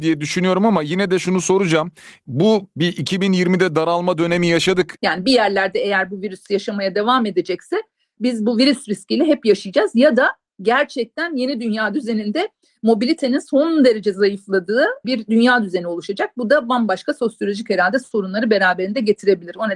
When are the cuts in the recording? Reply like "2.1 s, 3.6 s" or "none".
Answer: 5.0 s, 15.0 s